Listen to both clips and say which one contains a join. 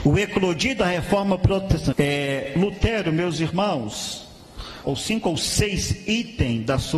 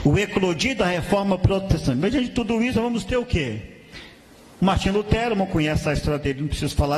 first; 2 cuts; at 1.9 s, 4.8 s

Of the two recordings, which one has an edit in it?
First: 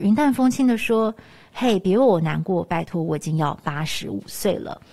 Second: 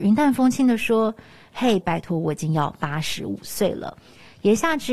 second; 1 cut; at 1.8 s

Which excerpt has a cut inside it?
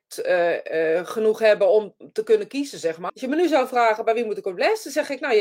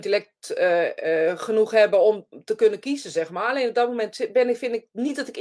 first; 1 cut; at 3.1 s

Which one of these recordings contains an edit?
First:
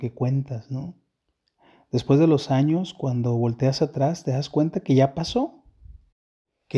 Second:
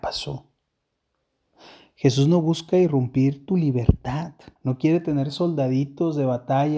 second; 1 cut; at 4.6 s

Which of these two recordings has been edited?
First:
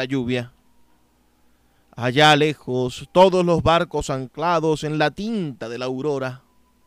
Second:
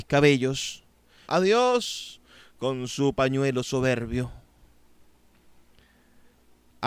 second; 1 cut; at 1.3 s

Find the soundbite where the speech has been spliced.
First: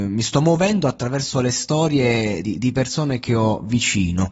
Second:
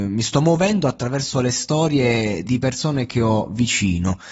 second; 1 cut; at 2.4 s

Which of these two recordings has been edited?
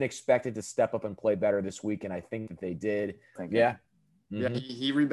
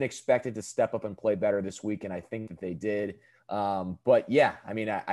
first; 1 cut; at 3.4 s

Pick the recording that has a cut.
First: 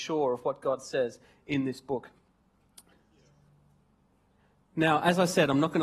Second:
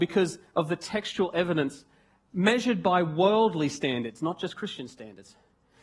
first; 1 cut; at 2.9 s

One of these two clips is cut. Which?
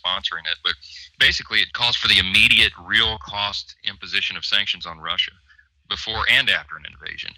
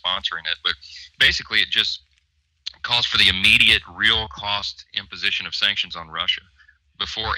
first; 1 cut; at 1.7 s

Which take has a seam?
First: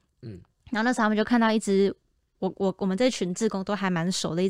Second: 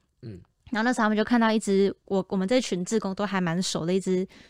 second; 1 cut; at 2.1 s

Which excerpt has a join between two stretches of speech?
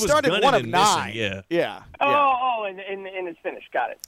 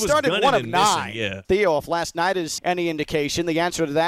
second; 2 cuts; at 1.4 s, 2.6 s

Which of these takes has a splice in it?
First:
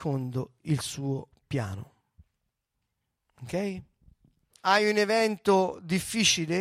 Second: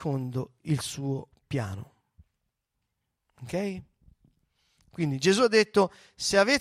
first; 1 cut; at 4.5 s

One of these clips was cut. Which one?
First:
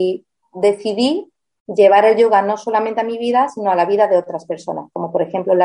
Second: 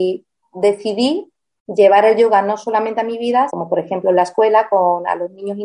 second; 1 cut; at 3.5 s

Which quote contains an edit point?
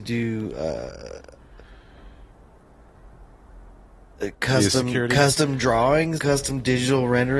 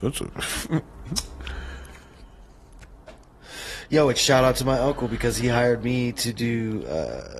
first; 1 cut; at 6.2 s

